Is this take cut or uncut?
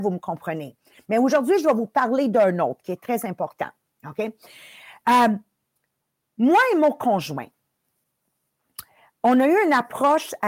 cut